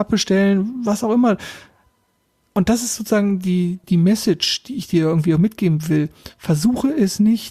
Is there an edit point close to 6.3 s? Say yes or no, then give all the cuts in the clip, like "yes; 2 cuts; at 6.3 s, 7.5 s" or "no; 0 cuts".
no; 1 cut; at 3.8 s